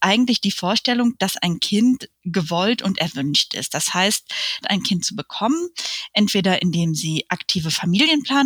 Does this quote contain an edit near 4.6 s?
yes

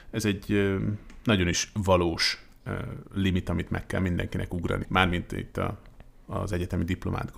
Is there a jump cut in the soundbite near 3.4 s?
no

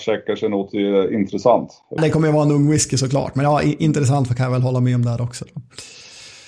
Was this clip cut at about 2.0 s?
yes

